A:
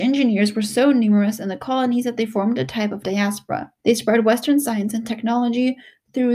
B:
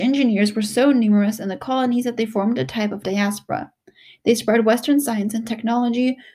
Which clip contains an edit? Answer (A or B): A